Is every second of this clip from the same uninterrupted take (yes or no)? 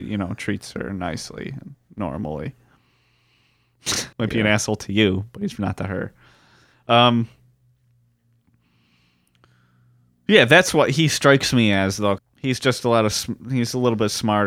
no